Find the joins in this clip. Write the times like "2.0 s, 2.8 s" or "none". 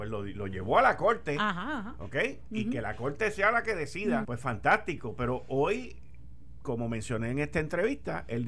4.2 s